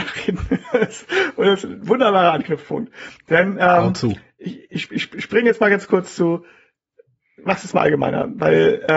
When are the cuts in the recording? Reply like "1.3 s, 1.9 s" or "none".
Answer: none